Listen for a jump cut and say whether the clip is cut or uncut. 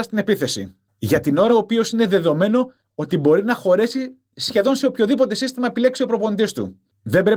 cut